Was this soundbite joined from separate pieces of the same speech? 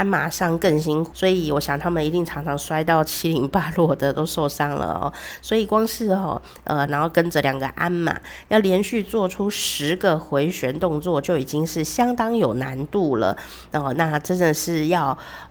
yes; 2 cuts; at 1.1 s, 6.9 s

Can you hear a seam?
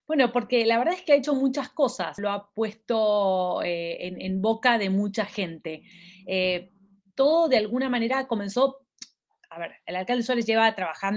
yes; 1 cut; at 2.2 s

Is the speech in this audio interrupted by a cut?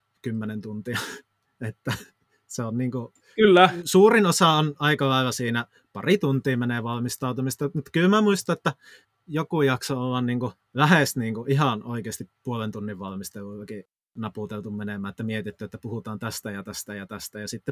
no; 0 cuts

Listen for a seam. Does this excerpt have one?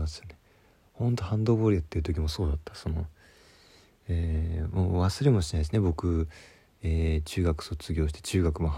no; 0 cuts

